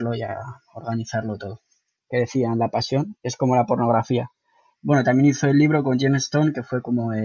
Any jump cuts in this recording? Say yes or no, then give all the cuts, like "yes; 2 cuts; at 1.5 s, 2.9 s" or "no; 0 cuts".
yes; 2 cuts; at 2.0 s, 4.8 s